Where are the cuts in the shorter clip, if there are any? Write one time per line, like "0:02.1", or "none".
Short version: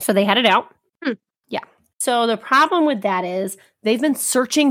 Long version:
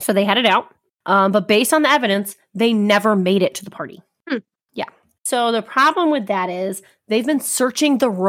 0:00.9

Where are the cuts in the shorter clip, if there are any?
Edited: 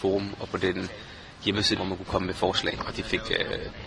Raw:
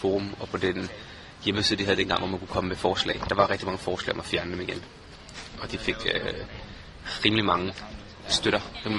0:01.8
0:02.8

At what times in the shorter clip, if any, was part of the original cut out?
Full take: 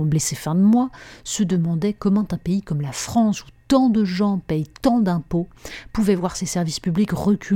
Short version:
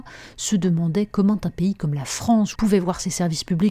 0:02.5

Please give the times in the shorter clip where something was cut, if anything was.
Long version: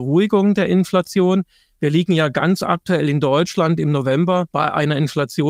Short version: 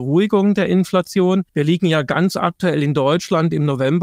0:01.5

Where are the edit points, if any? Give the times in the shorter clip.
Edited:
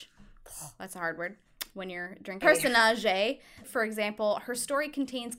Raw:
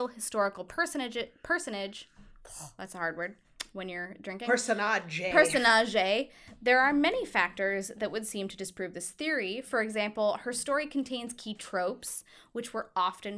0:02.4
0:03.6

